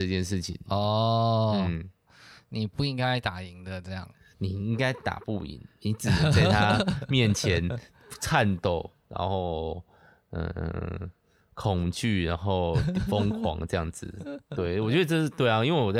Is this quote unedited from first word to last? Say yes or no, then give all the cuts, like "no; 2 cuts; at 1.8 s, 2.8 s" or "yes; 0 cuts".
yes; 0 cuts